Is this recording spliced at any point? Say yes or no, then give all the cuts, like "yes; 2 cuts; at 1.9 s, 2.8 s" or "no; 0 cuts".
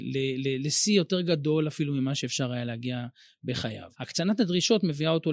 yes; 1 cut; at 3.9 s